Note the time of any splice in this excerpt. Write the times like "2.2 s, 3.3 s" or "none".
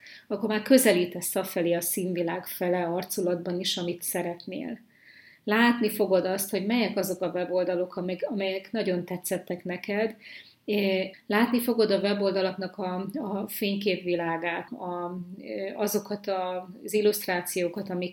11.1 s, 14.7 s